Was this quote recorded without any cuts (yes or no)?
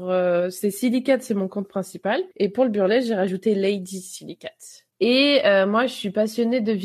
no